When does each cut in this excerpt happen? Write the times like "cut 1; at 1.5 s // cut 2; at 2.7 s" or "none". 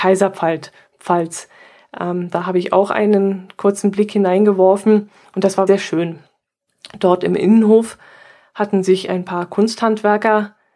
cut 1; at 5.7 s